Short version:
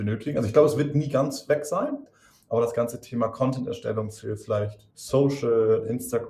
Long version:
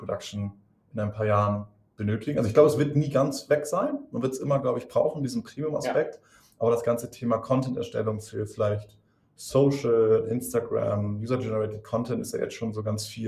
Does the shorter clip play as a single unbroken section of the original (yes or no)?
no